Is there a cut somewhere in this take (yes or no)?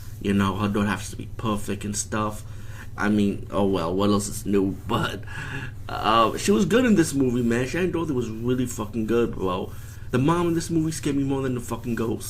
yes